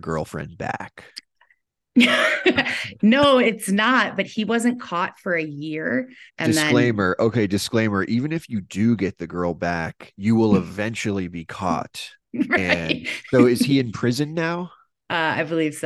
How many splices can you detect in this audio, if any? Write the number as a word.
one